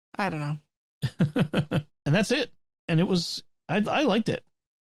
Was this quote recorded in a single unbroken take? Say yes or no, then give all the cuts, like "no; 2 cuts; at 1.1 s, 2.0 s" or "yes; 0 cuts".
no; 1 cut; at 1.9 s